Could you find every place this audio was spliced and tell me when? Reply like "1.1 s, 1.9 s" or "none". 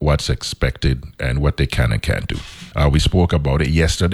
2.7 s